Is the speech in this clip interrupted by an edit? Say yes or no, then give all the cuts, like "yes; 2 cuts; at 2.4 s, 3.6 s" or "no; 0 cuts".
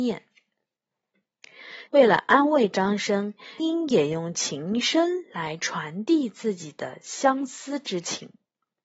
yes; 2 cuts; at 1.9 s, 3.6 s